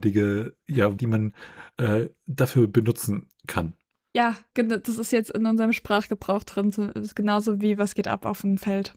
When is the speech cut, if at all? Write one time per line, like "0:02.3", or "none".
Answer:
0:01.0